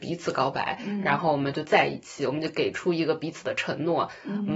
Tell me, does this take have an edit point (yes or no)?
no